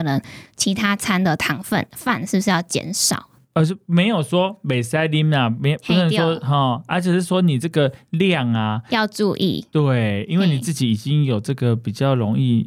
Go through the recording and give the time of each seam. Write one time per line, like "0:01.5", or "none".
0:03.4